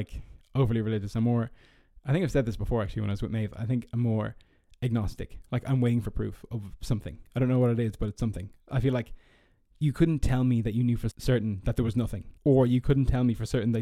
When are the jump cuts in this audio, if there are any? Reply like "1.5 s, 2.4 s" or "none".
11.1 s, 12.4 s